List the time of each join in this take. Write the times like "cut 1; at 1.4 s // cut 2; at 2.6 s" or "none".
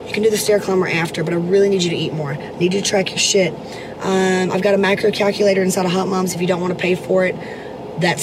none

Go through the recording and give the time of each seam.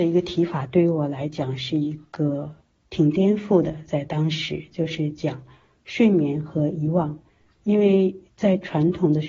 cut 1; at 3.9 s

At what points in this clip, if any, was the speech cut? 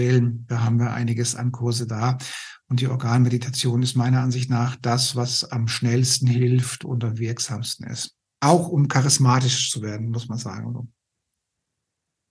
none

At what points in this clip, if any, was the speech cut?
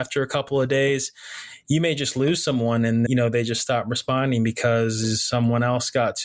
cut 1; at 3.1 s

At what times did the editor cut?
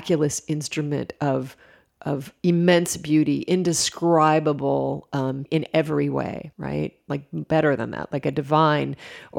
cut 1; at 5.5 s // cut 2; at 6.5 s

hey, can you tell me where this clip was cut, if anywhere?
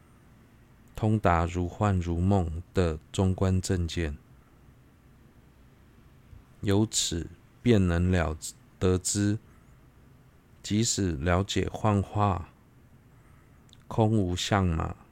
cut 1; at 6.5 s

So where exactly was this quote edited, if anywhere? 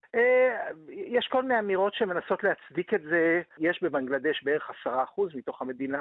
cut 1; at 3.6 s

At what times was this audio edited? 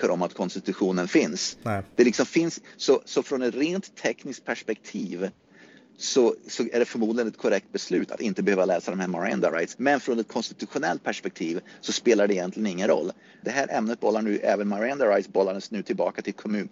cut 1; at 9.7 s // cut 2; at 13.4 s

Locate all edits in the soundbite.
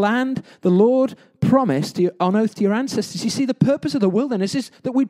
none

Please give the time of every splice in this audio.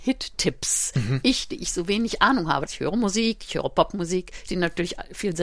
cut 1; at 2.7 s // cut 2; at 4.5 s

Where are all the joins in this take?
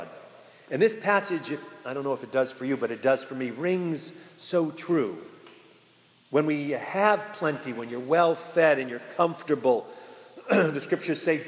none

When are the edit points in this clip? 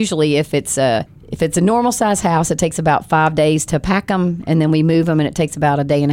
none

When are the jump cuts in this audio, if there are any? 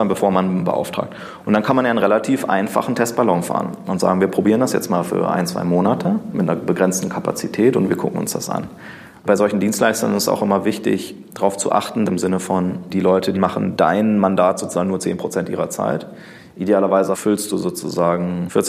cut 1; at 9.1 s // cut 2; at 12.1 s // cut 3; at 13.3 s

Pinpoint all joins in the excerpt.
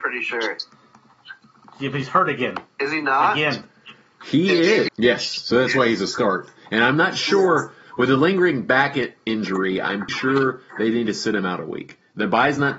cut 1; at 4.9 s // cut 2; at 10.1 s

